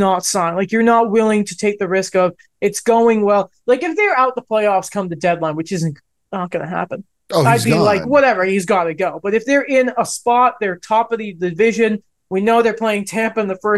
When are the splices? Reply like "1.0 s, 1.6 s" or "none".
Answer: none